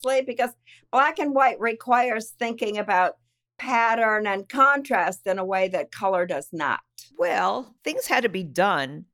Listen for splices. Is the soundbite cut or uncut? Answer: cut